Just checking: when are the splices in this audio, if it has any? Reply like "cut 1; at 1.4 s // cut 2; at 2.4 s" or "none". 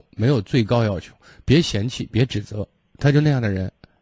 none

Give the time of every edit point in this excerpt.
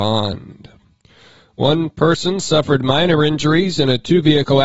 none

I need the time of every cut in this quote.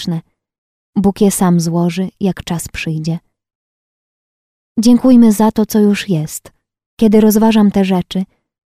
cut 1; at 6.9 s

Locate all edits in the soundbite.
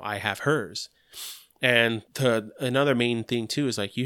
cut 1; at 2.1 s

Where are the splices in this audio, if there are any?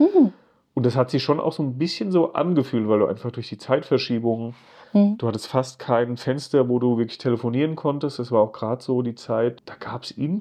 none

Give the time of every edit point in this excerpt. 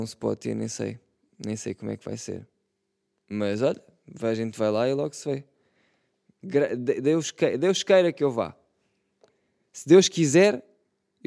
cut 1; at 6.4 s

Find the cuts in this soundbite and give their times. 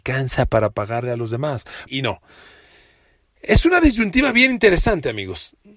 cut 1; at 1.9 s

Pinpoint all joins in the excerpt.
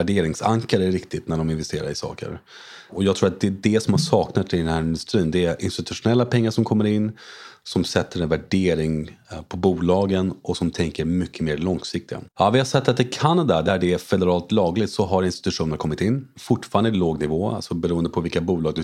cut 1; at 12.3 s

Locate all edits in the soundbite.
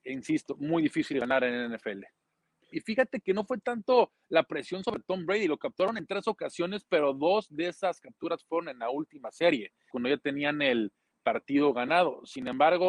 cut 1; at 2.7 s // cut 2; at 9.9 s

